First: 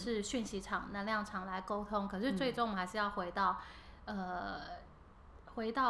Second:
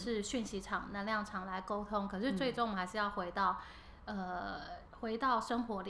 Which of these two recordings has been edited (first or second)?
second